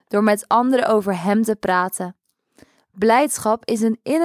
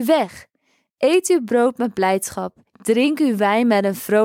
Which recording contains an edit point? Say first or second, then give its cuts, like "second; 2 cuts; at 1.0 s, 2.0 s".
second; 1 cut; at 2.7 s